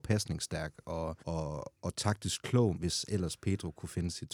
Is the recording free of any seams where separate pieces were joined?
no; 2 cuts; at 1.2 s, 2.7 s

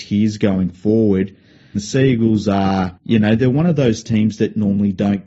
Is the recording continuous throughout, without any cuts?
no; 2 cuts; at 1.8 s, 3.0 s

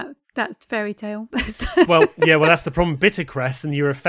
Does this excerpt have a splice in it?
no; 0 cuts

